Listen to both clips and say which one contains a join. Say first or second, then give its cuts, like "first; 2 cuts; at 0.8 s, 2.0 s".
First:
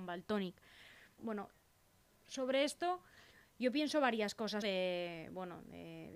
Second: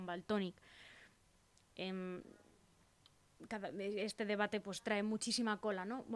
first; 2 cuts; at 1.2 s, 4.6 s